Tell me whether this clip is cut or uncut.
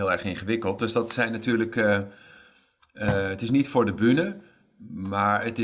uncut